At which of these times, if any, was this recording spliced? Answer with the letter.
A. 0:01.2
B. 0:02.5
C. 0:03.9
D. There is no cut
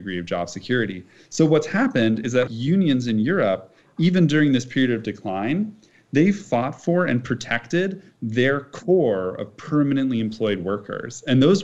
B